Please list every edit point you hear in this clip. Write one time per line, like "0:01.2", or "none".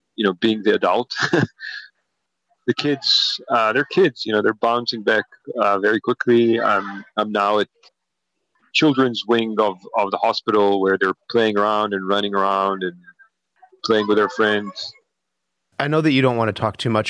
0:15.7